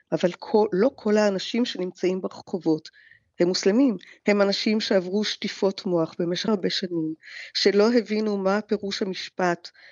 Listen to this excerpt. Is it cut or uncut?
cut